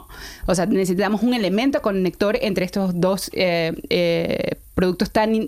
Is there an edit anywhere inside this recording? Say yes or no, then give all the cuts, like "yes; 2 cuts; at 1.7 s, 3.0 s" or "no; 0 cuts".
no; 0 cuts